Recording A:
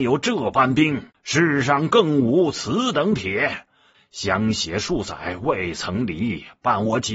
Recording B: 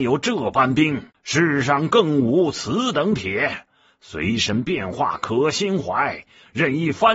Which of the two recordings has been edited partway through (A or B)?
A